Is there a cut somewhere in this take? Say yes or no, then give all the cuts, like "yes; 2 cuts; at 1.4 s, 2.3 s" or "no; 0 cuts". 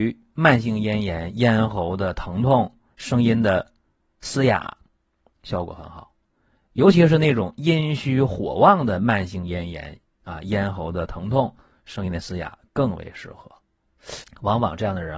yes; 1 cut; at 14.2 s